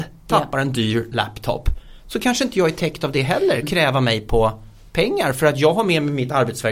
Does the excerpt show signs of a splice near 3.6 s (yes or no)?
yes